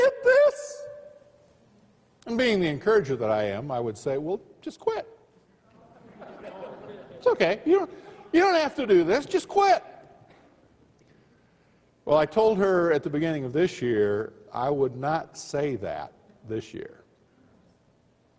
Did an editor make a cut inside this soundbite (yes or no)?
no